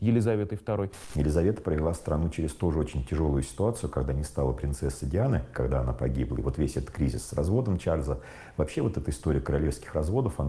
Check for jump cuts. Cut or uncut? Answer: uncut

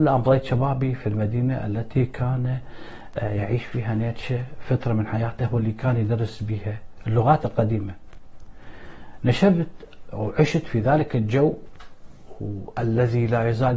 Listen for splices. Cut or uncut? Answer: uncut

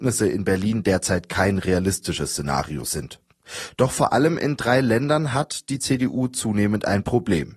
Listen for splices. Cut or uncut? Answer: uncut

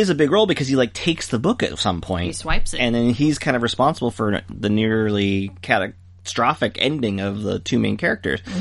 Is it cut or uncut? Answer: uncut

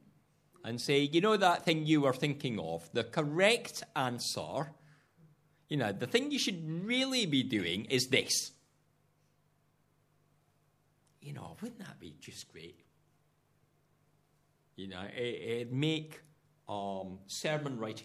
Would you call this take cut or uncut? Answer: uncut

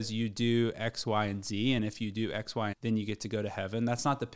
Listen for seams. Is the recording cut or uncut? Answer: cut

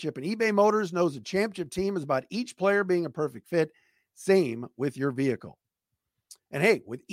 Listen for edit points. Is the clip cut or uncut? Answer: uncut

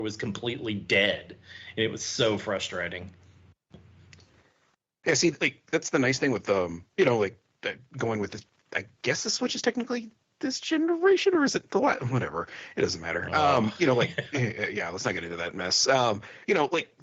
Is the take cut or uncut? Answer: uncut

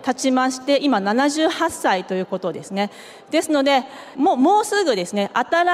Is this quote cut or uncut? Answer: cut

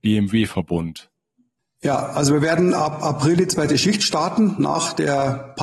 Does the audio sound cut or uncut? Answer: uncut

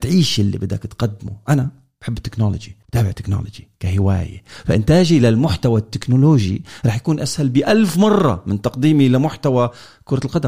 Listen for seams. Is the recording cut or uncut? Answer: cut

